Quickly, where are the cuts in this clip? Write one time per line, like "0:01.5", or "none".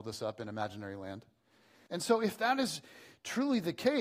0:01.9